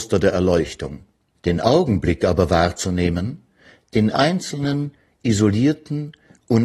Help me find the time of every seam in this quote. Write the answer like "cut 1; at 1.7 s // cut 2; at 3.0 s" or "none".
cut 1; at 1.3 s